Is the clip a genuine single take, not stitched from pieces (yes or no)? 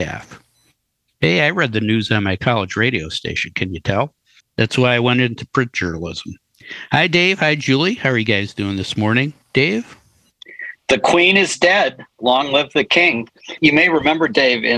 yes